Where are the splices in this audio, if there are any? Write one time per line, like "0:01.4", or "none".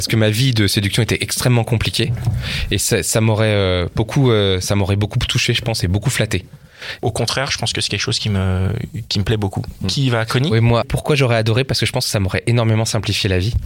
0:07.0
0:10.8